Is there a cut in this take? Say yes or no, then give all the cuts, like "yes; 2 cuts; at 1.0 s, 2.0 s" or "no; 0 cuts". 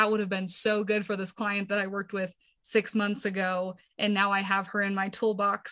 no; 0 cuts